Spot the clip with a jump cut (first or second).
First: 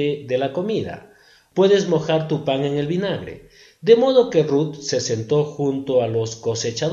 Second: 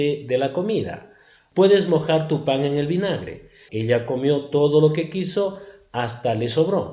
second